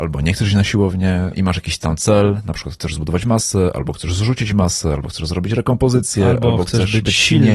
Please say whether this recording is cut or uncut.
cut